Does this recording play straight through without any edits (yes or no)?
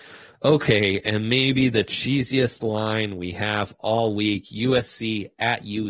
yes